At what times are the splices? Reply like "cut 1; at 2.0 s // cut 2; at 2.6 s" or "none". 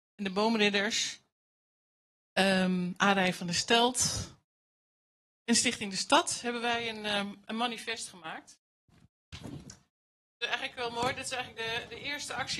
none